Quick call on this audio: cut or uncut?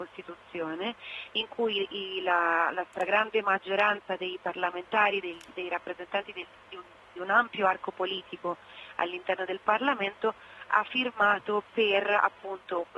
uncut